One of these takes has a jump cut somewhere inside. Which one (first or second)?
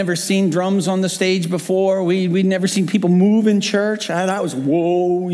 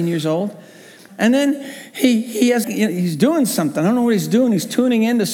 second